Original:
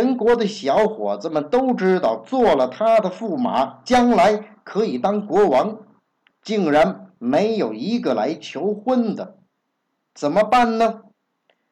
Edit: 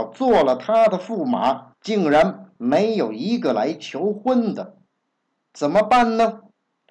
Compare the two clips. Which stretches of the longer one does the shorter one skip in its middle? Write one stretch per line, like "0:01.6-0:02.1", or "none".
0:03.8-0:06.3